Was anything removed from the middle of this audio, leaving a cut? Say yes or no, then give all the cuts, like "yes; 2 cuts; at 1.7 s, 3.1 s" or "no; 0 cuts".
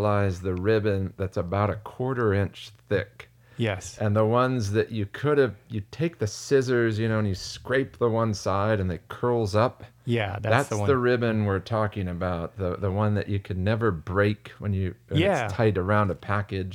no; 0 cuts